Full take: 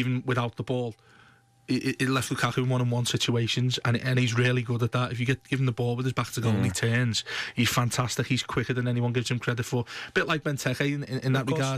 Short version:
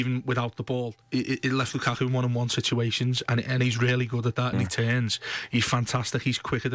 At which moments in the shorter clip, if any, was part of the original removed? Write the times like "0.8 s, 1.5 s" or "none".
1.0 s, 4.5 s